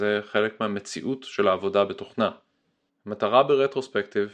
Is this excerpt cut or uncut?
cut